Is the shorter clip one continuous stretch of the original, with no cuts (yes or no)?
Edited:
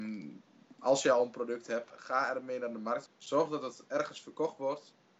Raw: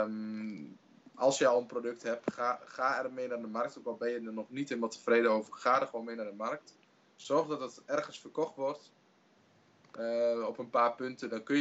no